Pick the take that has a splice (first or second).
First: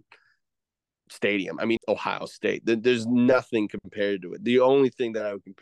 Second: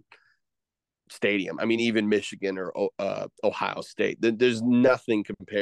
first